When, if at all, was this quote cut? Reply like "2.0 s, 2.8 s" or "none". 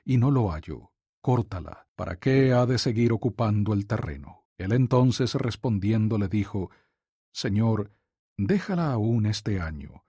none